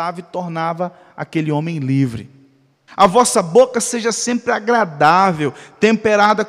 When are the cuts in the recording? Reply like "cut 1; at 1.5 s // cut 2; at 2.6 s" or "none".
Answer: cut 1; at 2.9 s